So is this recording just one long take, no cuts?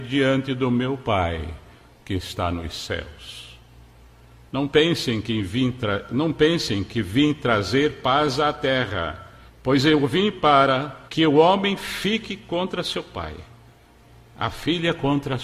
no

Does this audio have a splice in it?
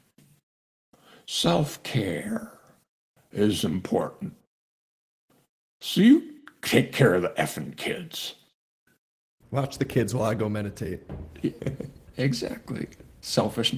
yes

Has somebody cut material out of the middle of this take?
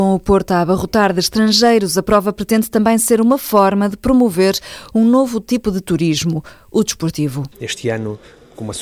yes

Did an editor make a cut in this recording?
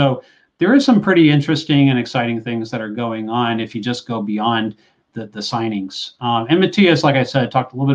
no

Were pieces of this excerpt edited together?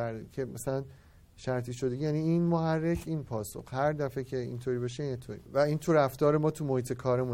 no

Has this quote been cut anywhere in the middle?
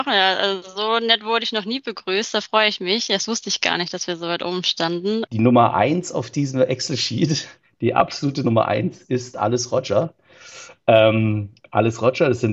yes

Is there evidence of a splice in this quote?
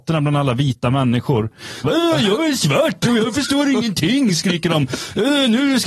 yes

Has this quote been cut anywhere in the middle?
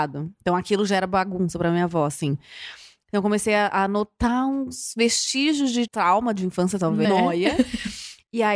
yes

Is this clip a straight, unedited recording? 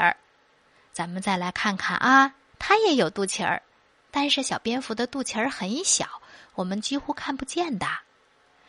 no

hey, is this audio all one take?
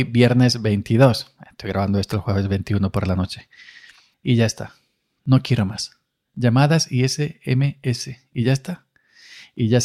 no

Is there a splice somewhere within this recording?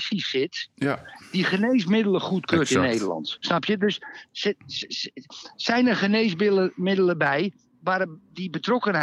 yes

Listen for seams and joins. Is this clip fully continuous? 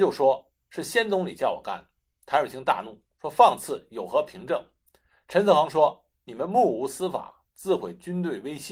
yes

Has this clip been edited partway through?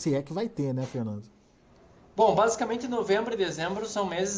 no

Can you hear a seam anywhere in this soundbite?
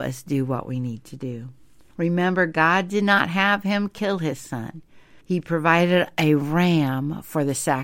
yes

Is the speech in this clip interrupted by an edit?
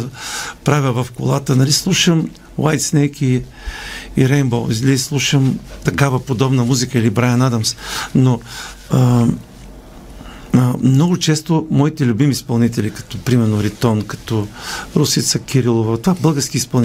no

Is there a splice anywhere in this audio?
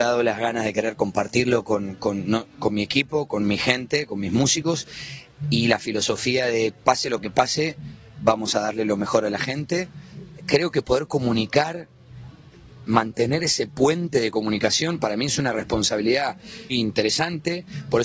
yes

